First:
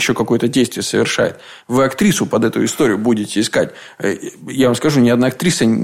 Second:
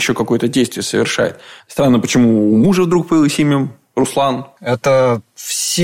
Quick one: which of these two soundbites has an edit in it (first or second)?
second